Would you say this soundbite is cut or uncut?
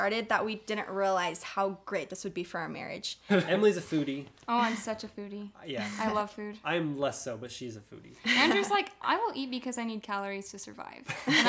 cut